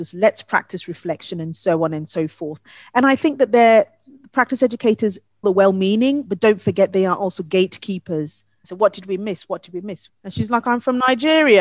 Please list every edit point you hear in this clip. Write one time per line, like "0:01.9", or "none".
0:05.4
0:08.6
0:10.1

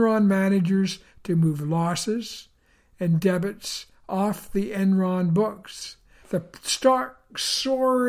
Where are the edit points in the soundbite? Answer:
0:06.2

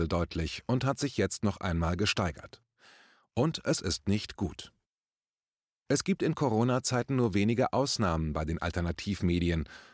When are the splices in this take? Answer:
none

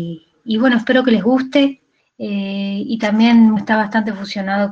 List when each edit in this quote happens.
0:02.0
0:03.6

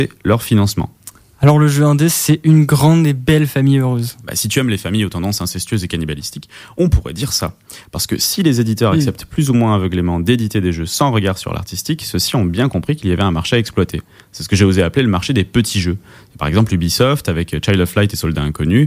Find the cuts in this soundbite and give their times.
none

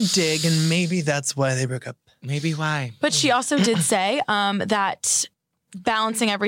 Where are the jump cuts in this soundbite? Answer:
none

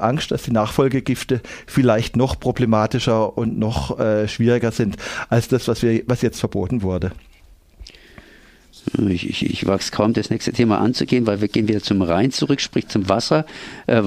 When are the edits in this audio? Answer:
0:09.5

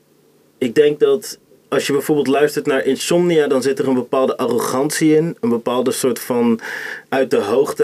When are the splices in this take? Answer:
none

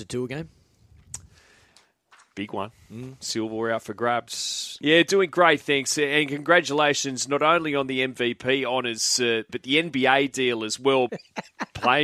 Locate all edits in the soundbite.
0:04.8
0:09.5
0:11.1

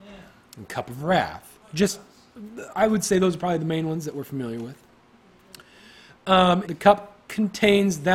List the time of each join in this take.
0:06.7

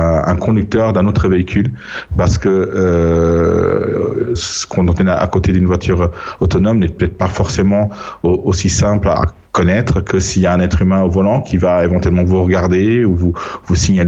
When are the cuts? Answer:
0:04.4
0:09.2

